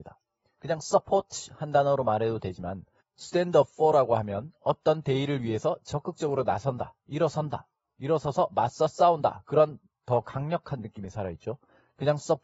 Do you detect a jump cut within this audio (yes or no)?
no